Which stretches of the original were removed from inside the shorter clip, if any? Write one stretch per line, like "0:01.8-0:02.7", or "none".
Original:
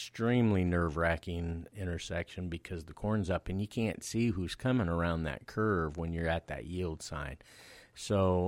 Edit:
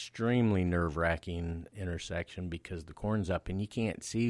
none